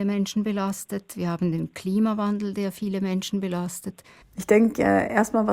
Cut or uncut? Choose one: cut